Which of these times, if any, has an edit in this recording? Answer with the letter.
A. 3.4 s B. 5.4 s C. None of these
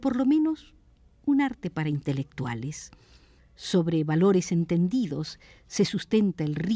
A